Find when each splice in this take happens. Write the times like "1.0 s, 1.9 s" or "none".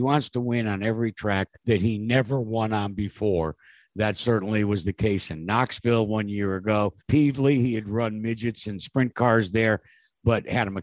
1.6 s, 7.0 s